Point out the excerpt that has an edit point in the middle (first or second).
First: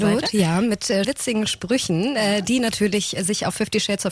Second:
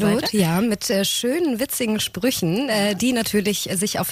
first